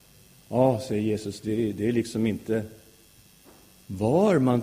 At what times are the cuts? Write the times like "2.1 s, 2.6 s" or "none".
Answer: none